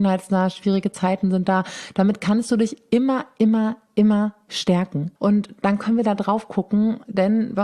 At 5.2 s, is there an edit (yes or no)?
yes